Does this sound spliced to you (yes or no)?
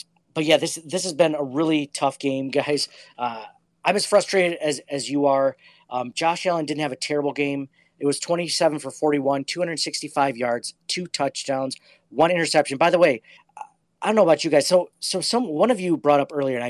no